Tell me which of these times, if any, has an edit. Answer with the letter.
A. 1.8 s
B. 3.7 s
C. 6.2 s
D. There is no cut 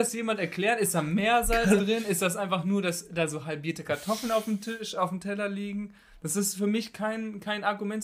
A